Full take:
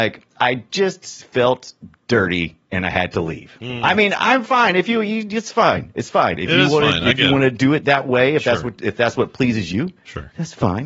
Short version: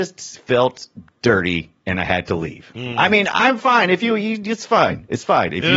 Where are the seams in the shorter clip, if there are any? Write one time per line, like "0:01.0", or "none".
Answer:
none